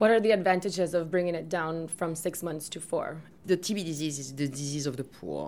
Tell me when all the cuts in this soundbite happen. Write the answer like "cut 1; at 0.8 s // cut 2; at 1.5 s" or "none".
cut 1; at 3.4 s